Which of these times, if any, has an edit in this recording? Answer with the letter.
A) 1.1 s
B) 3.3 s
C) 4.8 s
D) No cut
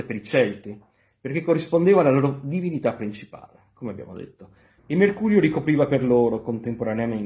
C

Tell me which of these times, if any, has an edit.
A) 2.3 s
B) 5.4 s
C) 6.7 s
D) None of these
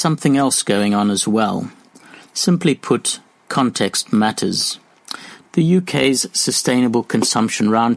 B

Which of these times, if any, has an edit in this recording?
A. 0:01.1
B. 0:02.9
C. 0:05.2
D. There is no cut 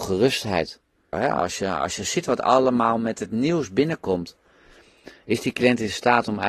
A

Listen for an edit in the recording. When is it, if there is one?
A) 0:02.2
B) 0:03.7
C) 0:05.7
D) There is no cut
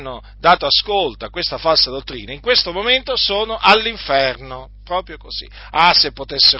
D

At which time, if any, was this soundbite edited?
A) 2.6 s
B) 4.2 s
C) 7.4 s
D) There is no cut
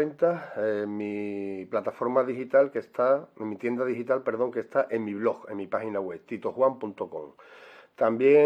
D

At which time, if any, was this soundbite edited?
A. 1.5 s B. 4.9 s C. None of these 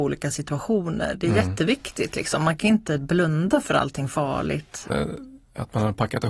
B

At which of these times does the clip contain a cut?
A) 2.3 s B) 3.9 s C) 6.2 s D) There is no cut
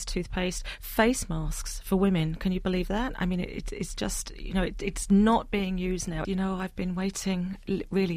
C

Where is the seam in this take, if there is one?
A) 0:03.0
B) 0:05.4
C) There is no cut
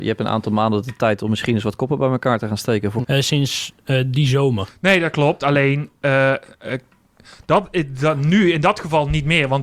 A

